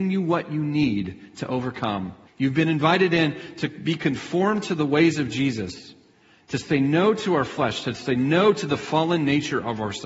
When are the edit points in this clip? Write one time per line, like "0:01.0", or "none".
0:02.3